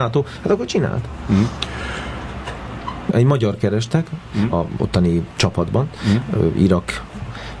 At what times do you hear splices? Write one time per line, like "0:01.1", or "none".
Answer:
0:03.1
0:04.5